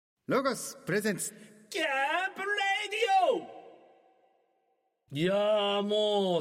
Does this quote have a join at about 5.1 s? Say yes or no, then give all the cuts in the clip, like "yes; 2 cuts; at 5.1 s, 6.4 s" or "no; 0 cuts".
yes; 1 cut; at 5.1 s